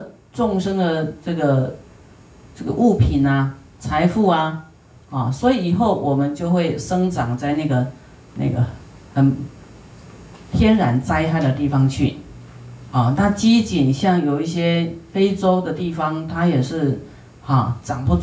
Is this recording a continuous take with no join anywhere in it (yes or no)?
yes